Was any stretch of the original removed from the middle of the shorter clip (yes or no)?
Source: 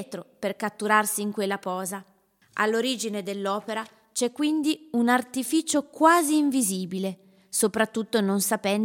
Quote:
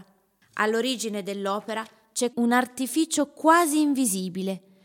yes